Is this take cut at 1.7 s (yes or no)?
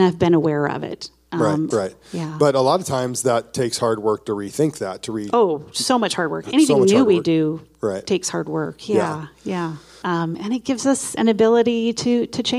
yes